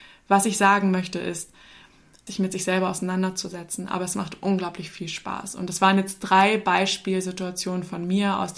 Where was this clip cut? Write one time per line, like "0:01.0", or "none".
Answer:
0:02.3